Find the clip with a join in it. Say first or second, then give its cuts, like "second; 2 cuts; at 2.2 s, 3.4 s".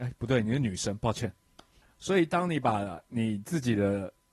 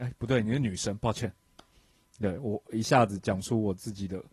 first; 1 cut; at 1.8 s